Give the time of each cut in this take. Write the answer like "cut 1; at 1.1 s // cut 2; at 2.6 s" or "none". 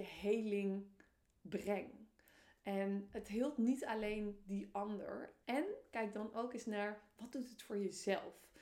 cut 1; at 5.4 s